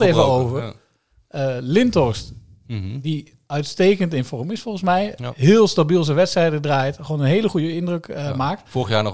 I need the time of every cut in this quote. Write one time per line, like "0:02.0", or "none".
none